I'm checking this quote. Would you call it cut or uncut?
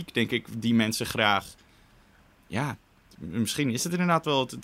uncut